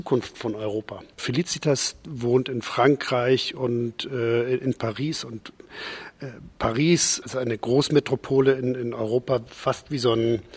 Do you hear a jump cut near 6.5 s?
no; 1 cut; at 1.1 s

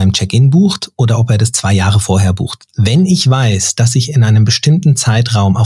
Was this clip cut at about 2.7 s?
yes; 1 cut; at 2.7 s

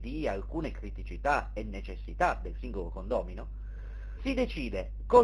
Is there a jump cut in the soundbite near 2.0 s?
no; 1 cut; at 4.2 s

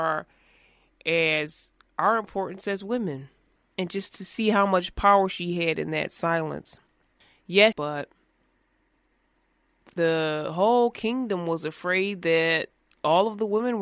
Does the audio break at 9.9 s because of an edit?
no; 2 cuts; at 3.7 s, 7.7 s

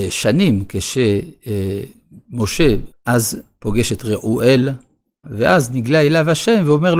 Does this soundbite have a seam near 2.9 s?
yes; 2 cuts; at 2.9 s, 5.2 s

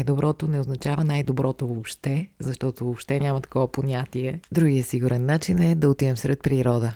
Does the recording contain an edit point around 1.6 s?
no; 1 cut; at 4.5 s

